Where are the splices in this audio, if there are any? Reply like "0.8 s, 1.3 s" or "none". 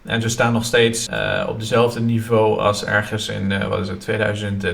1.1 s